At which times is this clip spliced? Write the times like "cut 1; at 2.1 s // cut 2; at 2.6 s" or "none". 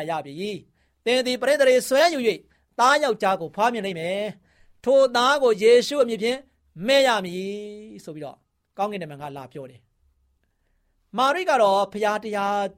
none